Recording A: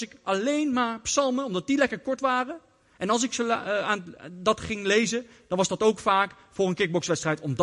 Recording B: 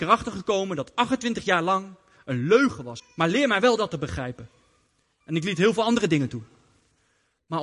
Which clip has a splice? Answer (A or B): B